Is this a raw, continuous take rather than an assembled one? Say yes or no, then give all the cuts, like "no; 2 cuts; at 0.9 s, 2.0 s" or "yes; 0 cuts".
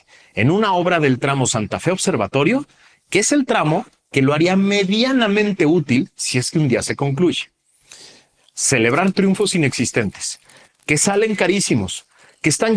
no; 2 cuts; at 8.5 s, 10.7 s